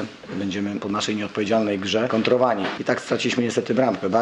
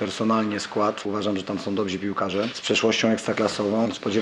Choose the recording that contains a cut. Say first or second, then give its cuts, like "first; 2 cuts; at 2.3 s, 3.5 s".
first; 1 cut; at 2.8 s